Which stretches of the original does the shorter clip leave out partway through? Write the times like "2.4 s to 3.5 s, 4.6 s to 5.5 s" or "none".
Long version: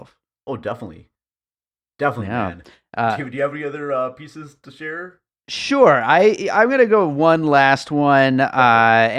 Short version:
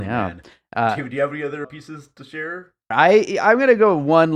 3.9 s to 4.1 s, 5.4 s to 6.0 s